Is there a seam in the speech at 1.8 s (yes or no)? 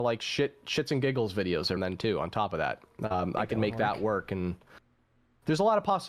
yes